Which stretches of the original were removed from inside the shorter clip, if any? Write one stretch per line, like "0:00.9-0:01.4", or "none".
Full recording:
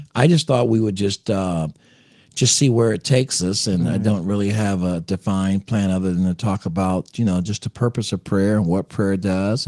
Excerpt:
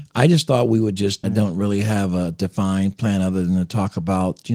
0:01.2-0:03.9